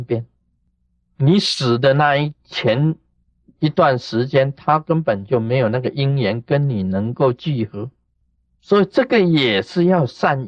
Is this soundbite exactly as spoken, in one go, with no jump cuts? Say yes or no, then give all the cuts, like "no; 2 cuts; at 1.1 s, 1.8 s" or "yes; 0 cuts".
no; 1 cut; at 8.4 s